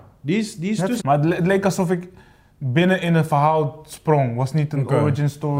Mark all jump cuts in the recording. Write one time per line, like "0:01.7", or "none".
0:01.0